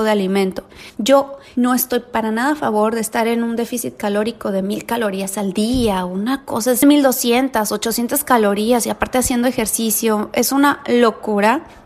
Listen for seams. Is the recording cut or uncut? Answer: cut